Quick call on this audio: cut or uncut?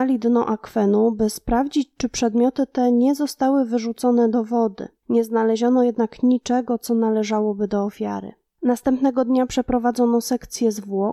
uncut